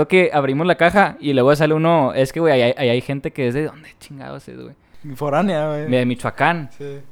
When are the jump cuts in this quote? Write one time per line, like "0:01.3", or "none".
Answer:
none

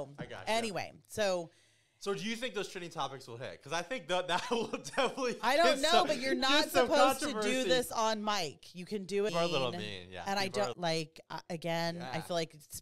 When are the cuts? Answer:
0:09.3
0:10.7

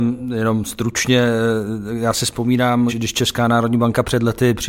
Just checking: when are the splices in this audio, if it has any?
0:02.9

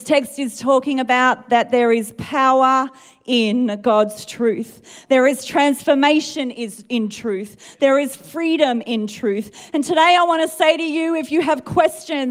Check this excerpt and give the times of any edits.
none

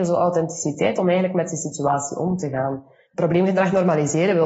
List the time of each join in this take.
0:03.0

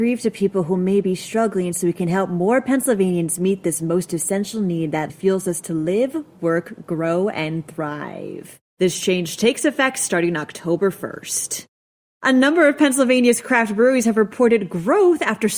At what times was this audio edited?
0:05.1
0:08.7

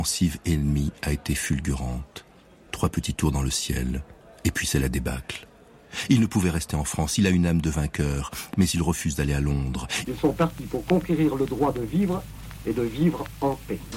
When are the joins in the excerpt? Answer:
0:10.0

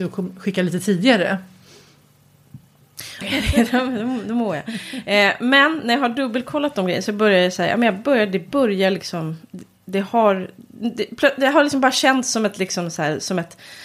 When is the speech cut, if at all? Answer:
0:03.2

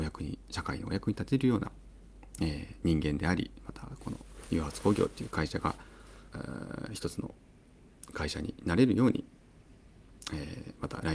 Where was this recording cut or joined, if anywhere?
0:06.3

